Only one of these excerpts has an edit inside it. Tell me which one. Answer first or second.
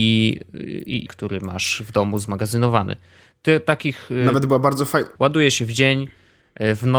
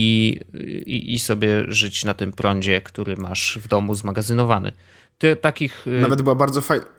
first